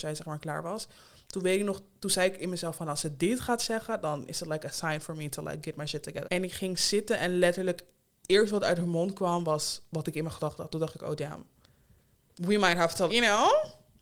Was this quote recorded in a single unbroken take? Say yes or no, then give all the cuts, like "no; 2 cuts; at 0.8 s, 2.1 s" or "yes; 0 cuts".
no; 2 cuts; at 6.2 s, 13.1 s